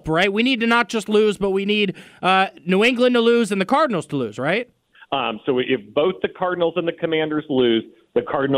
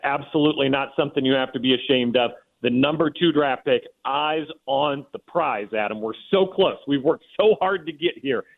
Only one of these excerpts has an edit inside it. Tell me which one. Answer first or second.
first